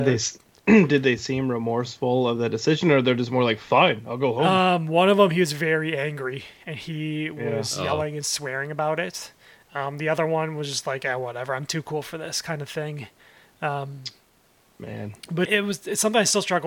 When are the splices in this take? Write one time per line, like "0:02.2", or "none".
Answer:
0:15.5